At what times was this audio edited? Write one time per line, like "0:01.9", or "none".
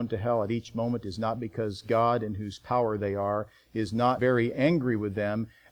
0:04.2